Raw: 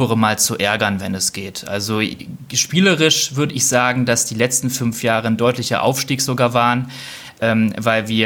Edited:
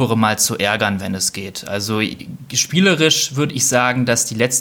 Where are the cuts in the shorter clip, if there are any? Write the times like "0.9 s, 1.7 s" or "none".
none